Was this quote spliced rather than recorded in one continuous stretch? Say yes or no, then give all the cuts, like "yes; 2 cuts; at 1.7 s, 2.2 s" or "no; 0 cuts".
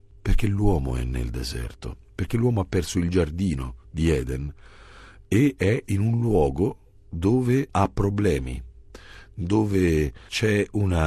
no; 0 cuts